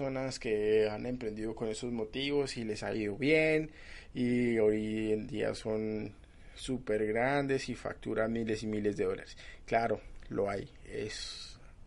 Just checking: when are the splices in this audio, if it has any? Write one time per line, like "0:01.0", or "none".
none